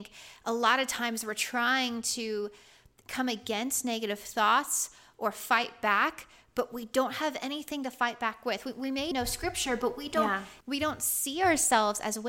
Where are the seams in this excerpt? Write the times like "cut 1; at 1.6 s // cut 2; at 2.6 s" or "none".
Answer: cut 1; at 9.1 s // cut 2; at 10.6 s